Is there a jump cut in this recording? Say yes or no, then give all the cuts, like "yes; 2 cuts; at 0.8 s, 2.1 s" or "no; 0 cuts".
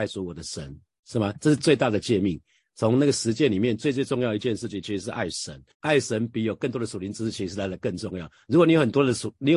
yes; 1 cut; at 5.7 s